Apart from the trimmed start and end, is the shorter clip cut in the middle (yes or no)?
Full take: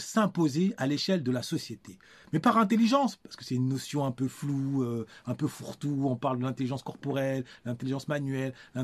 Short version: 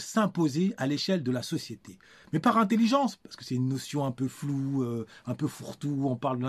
no